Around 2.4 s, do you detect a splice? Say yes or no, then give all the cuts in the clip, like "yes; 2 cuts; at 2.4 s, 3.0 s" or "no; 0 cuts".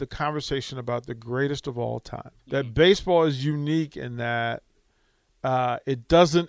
yes; 1 cut; at 2.4 s